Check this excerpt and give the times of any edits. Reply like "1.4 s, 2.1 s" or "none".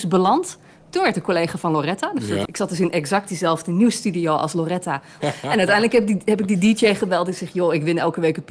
2.5 s, 5.2 s